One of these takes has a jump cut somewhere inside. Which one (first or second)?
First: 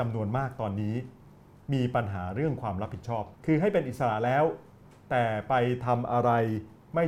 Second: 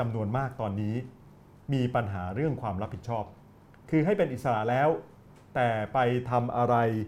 first